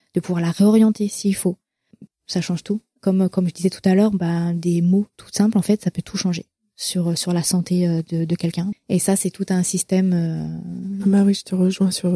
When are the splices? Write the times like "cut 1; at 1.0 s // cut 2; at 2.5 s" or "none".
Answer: cut 1; at 2.1 s // cut 2; at 8.7 s